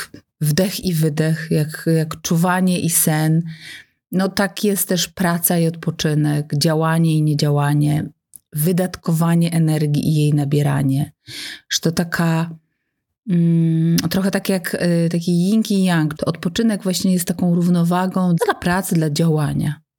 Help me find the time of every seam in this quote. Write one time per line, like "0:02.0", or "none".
0:16.2
0:18.4